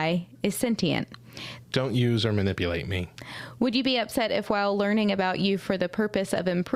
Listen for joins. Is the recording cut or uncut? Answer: cut